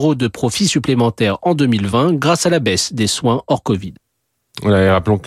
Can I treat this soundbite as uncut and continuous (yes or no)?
yes